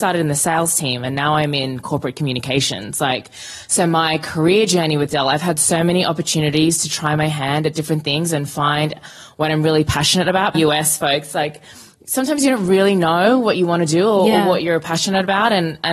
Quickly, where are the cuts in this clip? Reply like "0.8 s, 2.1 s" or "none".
10.5 s